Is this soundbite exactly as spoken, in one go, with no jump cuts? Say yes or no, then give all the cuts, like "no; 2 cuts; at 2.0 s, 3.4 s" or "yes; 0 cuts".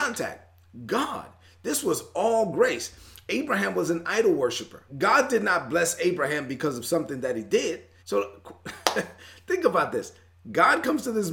no; 2 cuts; at 4.9 s, 8.0 s